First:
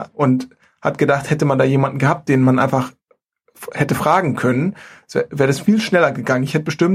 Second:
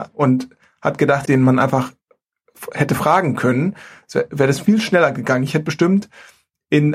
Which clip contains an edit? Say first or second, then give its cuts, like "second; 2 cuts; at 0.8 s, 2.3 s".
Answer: second; 1 cut; at 1.3 s